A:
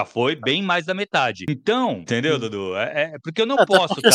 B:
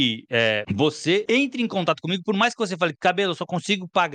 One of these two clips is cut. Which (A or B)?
A